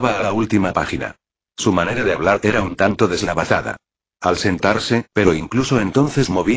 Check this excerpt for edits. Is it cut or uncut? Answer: cut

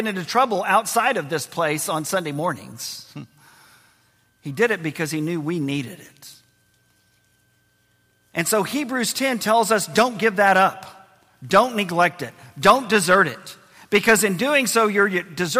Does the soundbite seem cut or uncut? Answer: uncut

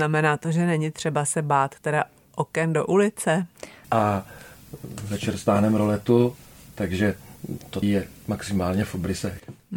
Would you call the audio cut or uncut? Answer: cut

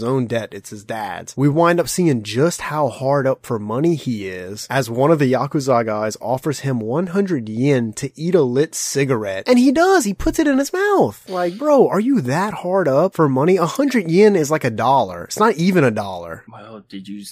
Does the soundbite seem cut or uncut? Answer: uncut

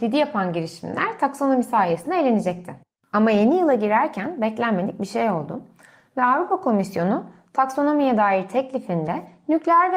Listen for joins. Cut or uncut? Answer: uncut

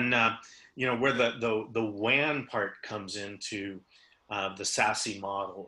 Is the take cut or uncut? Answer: uncut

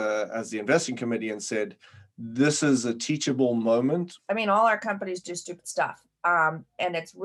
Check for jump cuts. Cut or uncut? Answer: cut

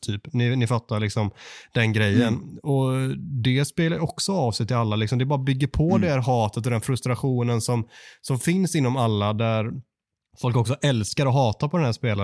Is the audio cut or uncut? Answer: uncut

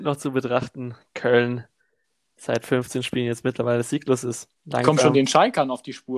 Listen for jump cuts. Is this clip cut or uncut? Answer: cut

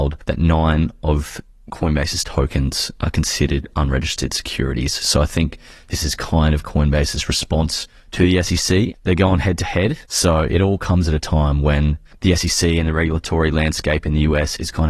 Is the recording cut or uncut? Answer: cut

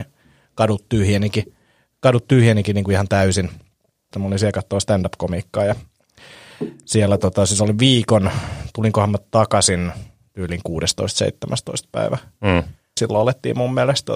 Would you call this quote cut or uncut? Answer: cut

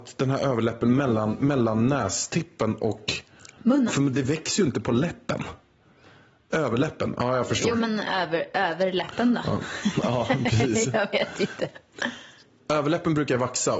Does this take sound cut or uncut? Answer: uncut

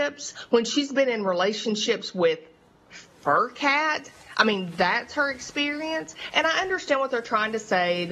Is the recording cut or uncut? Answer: uncut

